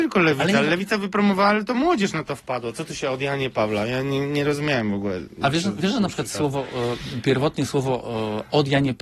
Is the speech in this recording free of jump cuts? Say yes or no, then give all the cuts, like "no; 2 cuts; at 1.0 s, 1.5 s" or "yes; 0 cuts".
yes; 0 cuts